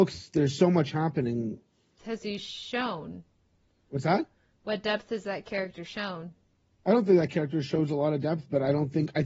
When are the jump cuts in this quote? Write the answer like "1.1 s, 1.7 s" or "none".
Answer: 2.0 s

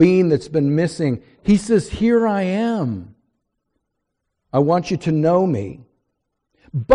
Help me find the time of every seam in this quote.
1.4 s

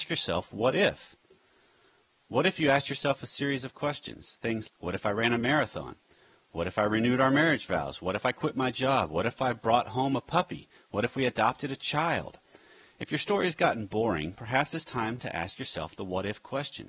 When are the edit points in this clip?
4.7 s

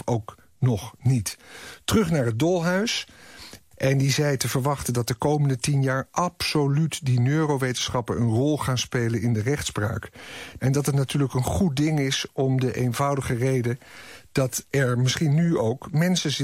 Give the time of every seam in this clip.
3.7 s, 10.6 s

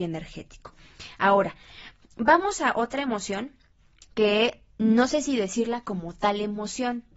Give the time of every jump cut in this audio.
none

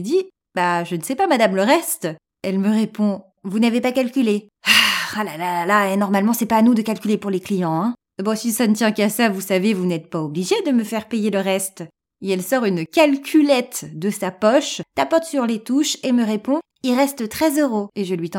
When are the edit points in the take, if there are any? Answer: 4.6 s

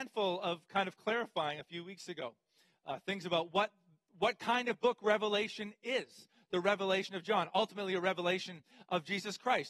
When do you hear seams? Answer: none

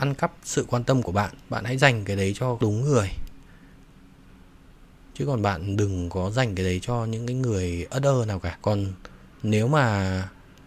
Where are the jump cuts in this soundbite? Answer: none

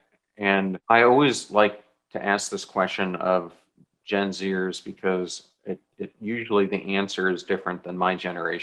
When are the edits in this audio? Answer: none

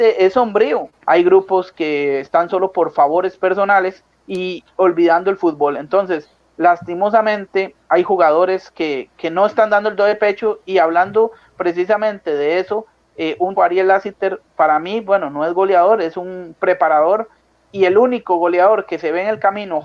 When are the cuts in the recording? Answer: 1.0 s, 13.6 s

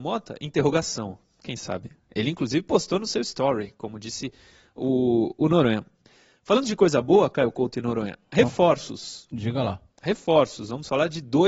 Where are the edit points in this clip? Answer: none

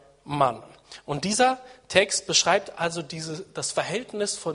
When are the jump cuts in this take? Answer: none

